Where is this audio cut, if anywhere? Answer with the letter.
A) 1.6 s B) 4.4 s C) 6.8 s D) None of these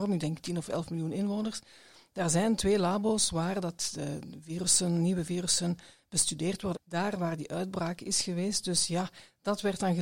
C